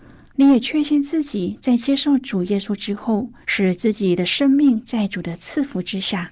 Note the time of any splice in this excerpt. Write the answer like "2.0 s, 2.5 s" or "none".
3.4 s